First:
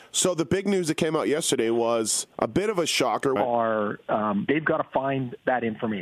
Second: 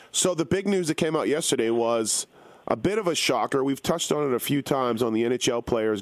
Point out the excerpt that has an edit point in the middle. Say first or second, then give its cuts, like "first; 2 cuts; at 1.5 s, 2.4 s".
first; 3 cuts; at 2.3 s, 3.4 s, 4.5 s